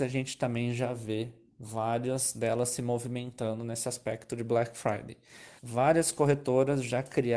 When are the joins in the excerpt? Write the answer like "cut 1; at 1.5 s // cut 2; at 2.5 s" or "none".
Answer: cut 1; at 5.6 s